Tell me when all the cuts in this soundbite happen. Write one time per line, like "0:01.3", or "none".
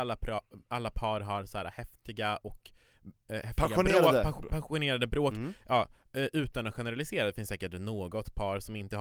none